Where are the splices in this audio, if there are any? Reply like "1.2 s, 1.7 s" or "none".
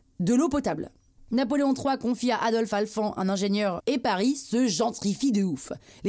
1.2 s, 3.8 s